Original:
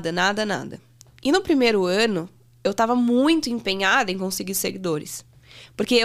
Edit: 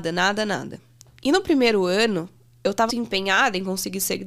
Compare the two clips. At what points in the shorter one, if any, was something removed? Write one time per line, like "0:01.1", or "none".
0:02.9